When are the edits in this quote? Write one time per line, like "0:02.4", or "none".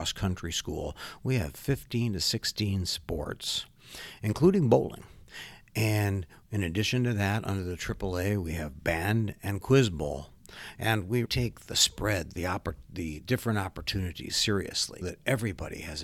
0:11.3
0:12.3
0:15.0